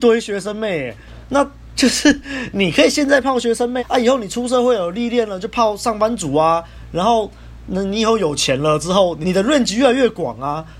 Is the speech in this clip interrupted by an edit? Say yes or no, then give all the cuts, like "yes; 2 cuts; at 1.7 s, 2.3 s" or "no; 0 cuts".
yes; 3 cuts; at 1.8 s, 3.8 s, 9.2 s